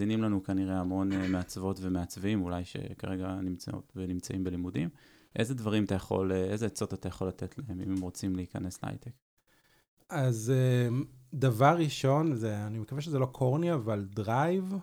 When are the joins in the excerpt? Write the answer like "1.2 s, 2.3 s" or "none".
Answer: none